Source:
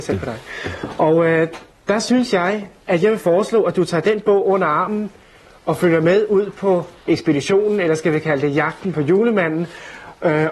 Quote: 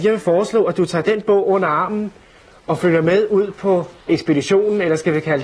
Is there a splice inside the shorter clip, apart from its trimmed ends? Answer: no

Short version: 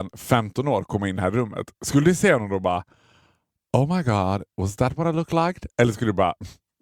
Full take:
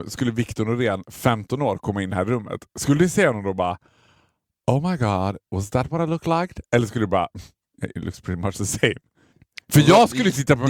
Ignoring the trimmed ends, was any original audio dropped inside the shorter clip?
no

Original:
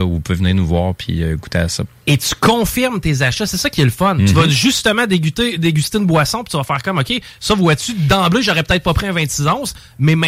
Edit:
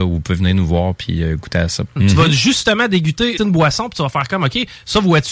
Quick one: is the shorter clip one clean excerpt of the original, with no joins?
no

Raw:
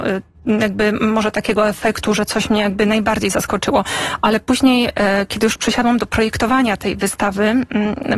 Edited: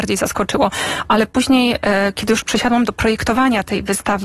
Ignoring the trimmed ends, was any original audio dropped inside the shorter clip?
no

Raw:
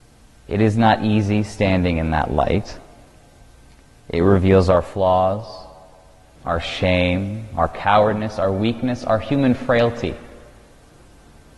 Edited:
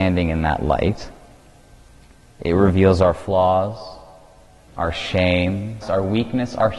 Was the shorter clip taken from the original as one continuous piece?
no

